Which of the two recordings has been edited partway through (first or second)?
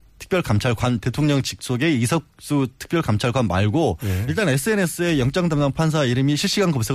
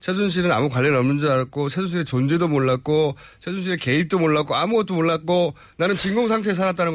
first